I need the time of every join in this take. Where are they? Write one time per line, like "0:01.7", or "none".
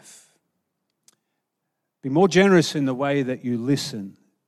none